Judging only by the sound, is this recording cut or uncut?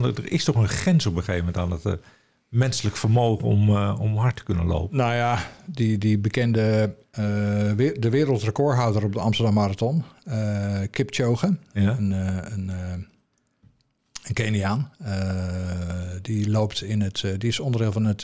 uncut